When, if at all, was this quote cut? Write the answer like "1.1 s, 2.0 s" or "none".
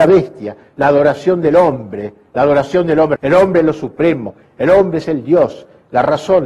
3.2 s